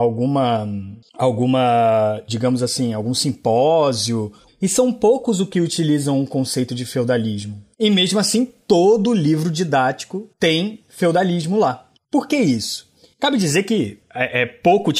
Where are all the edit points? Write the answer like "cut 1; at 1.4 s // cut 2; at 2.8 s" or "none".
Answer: cut 1; at 4.5 s // cut 2; at 7.7 s